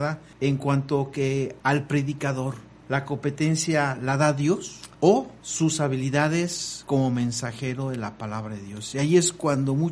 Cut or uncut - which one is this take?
uncut